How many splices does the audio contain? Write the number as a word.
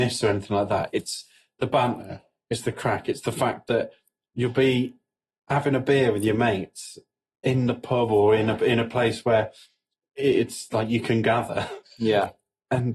zero